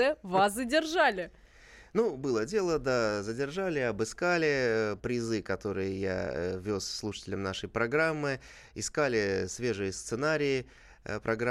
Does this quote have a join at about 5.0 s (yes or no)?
yes